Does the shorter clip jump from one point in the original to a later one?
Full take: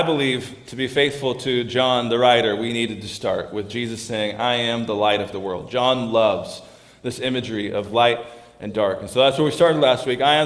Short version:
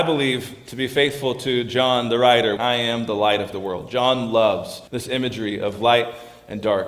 yes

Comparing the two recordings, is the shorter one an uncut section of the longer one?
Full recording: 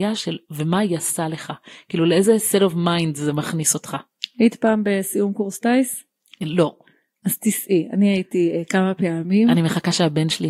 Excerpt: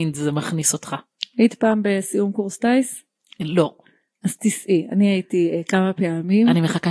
yes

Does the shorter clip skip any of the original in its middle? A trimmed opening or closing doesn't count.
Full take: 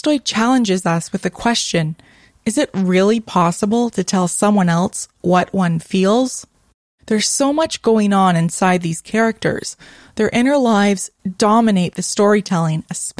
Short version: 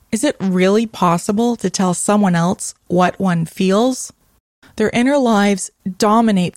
yes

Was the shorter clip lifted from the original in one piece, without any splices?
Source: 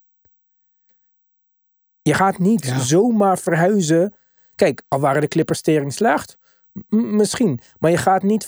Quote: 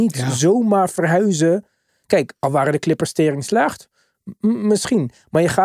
yes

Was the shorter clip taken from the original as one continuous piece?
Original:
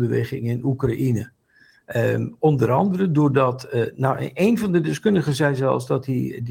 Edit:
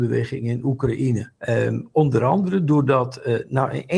no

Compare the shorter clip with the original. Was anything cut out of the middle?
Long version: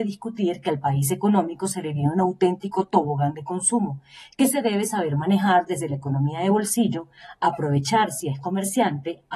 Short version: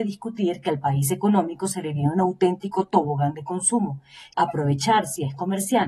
yes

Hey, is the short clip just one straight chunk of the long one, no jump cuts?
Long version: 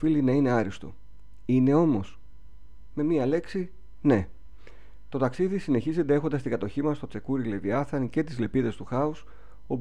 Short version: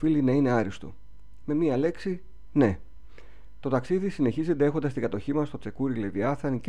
no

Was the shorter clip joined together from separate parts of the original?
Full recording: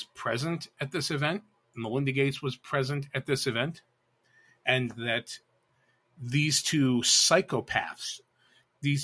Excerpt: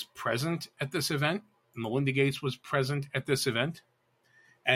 no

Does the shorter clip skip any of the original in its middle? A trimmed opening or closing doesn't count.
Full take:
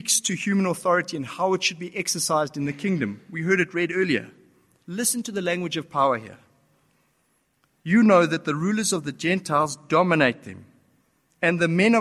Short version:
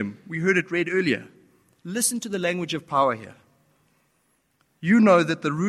no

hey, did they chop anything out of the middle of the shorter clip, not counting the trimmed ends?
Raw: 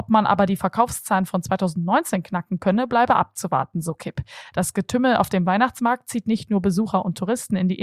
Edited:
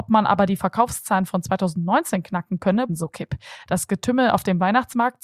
yes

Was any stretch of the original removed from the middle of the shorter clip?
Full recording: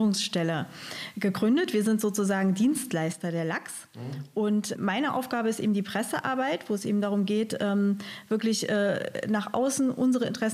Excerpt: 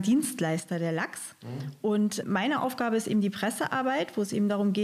no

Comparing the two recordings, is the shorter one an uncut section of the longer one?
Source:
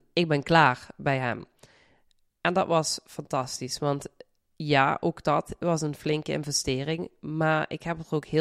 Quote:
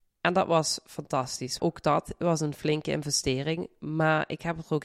no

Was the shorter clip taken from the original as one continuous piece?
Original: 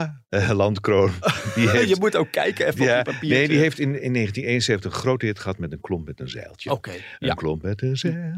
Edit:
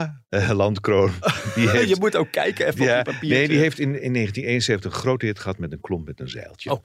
yes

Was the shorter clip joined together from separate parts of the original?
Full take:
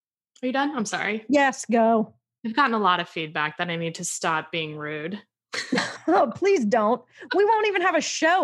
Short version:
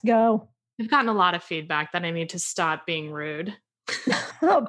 no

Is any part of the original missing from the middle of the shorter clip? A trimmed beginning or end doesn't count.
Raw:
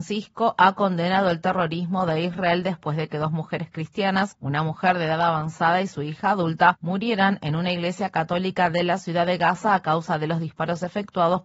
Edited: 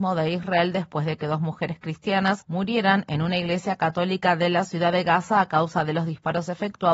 yes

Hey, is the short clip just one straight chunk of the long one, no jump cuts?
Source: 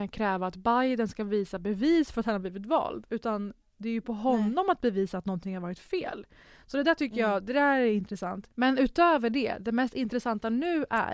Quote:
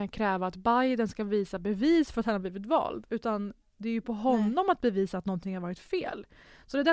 yes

